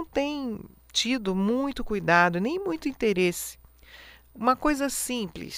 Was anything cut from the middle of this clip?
no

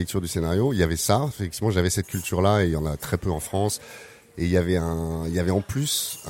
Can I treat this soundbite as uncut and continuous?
yes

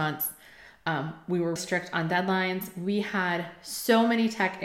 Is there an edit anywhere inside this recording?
yes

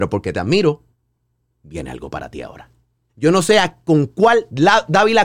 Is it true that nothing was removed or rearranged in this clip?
no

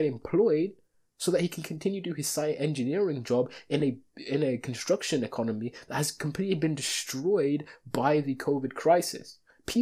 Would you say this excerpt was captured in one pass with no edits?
yes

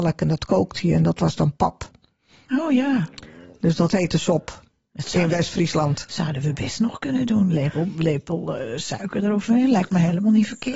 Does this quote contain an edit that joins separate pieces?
no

